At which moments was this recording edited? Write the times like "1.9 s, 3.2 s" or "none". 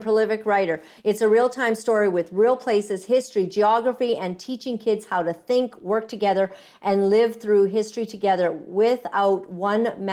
1.0 s